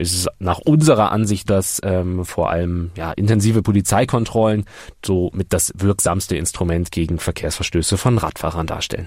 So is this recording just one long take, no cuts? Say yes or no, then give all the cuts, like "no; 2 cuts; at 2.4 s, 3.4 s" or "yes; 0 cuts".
no; 1 cut; at 1.5 s